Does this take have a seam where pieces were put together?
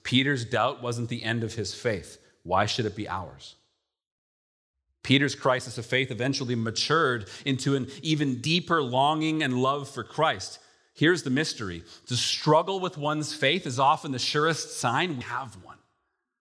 yes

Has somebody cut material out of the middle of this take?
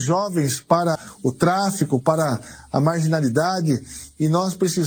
yes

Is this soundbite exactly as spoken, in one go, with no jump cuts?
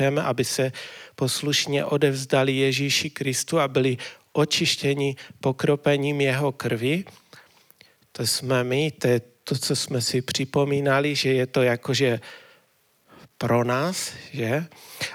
yes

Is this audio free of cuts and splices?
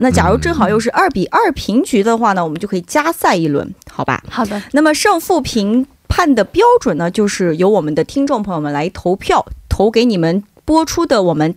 yes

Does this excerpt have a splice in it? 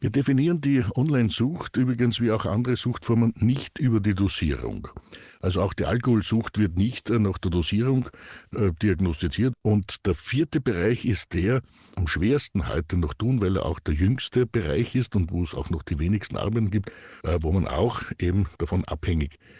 yes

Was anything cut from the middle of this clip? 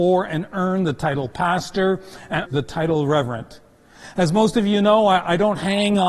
yes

